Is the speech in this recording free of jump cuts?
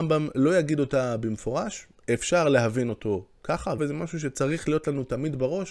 no; 1 cut; at 3.8 s

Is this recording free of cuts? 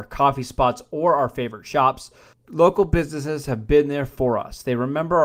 yes; 0 cuts

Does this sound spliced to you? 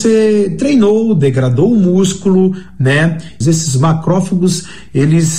yes; 1 cut; at 3.4 s

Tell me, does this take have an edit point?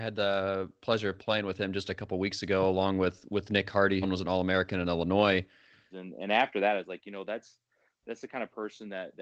yes; 2 cuts; at 4.0 s, 5.9 s

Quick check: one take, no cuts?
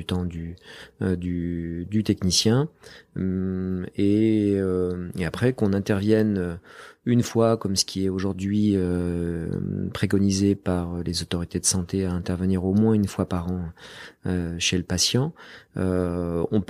yes; 0 cuts

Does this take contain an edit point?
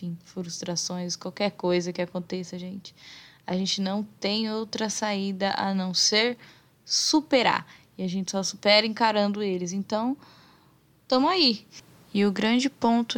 no; 0 cuts

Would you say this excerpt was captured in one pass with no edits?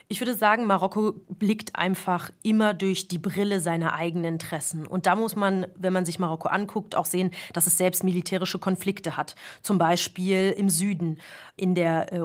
yes; 0 cuts

